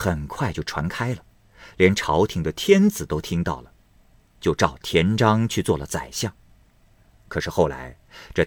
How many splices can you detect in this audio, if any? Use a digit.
0